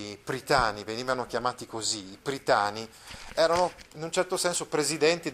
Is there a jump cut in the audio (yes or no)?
no